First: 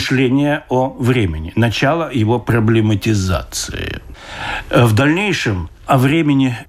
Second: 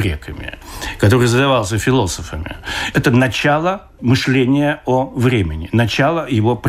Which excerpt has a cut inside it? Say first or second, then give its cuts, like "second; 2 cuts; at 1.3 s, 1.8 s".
second; 1 cut; at 2.9 s